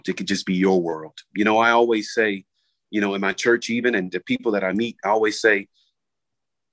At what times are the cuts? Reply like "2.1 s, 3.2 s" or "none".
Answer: 1.3 s